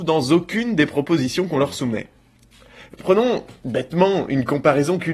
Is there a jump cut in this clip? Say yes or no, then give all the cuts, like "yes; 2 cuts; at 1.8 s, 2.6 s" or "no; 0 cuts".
no; 0 cuts